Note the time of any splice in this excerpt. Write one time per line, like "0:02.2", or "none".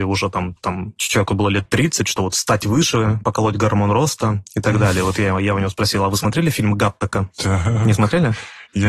none